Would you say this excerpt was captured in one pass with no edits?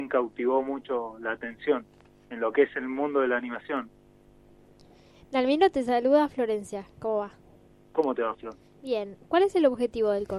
yes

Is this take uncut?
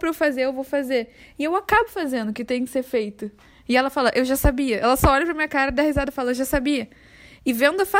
yes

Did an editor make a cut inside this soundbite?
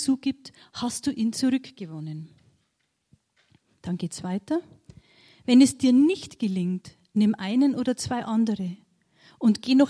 no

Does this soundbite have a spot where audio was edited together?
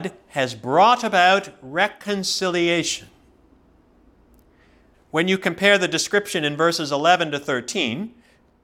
yes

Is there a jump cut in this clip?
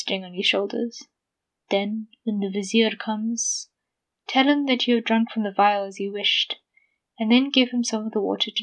yes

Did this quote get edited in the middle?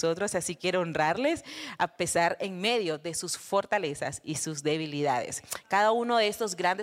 no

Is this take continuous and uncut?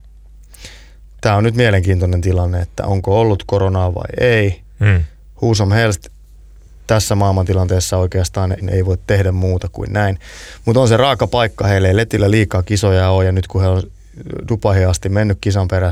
no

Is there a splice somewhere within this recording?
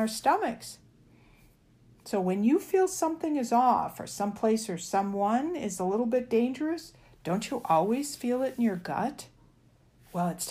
no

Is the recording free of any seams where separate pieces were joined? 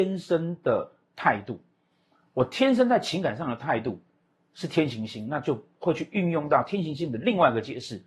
yes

